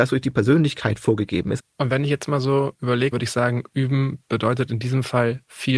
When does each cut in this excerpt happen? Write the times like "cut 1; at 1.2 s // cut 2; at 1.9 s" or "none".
cut 1; at 1.6 s // cut 2; at 3.1 s